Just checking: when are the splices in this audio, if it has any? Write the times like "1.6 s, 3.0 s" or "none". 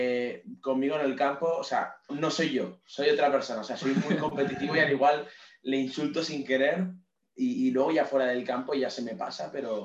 2.1 s